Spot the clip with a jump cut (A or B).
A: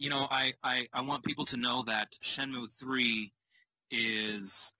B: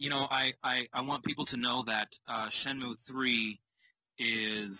A